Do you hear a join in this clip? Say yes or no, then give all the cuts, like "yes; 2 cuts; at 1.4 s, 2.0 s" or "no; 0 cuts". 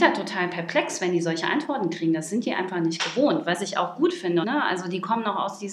yes; 1 cut; at 4.4 s